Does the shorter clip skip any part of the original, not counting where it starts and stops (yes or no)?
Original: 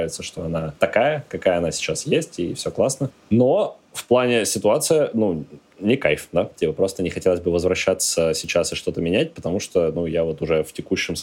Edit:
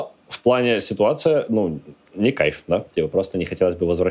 no